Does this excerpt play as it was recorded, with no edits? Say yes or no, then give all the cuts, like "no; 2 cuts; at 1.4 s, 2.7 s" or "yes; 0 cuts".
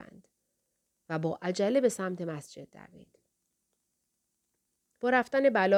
yes; 0 cuts